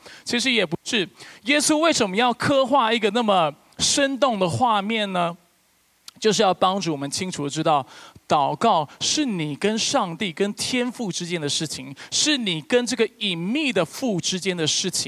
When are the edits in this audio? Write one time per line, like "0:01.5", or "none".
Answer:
none